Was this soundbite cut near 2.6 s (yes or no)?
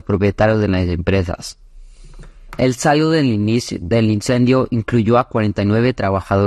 yes